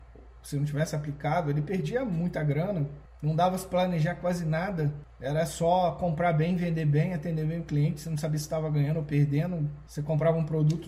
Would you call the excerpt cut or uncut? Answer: uncut